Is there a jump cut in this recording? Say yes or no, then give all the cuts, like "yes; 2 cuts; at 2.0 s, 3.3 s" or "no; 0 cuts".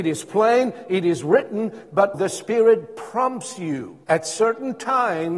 yes; 2 cuts; at 2.1 s, 4.0 s